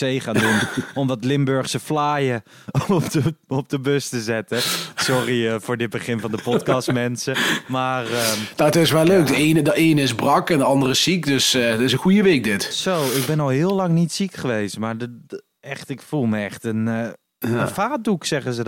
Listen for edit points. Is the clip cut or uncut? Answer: uncut